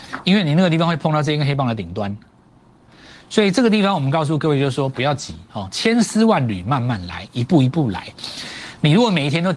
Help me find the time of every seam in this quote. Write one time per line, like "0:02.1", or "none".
none